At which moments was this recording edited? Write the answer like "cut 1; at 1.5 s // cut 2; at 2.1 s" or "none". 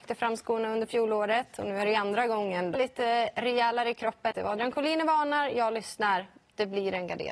cut 1; at 2.7 s // cut 2; at 4.3 s